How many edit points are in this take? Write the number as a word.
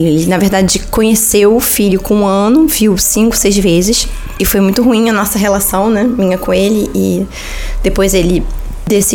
zero